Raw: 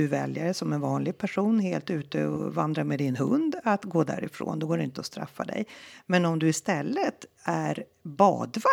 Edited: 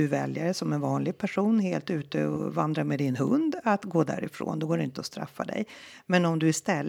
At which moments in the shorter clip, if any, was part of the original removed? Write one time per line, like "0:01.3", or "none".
none